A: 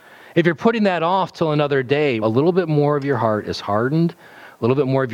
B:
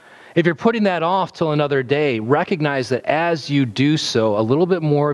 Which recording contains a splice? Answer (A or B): A